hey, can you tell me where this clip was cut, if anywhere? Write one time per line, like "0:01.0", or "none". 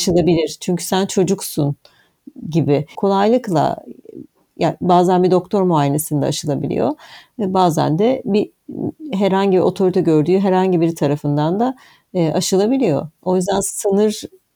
0:03.0